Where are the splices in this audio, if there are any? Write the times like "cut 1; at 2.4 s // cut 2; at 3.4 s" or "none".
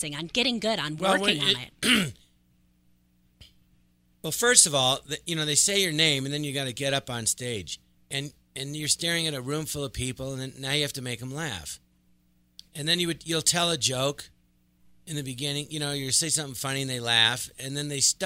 cut 1; at 7.9 s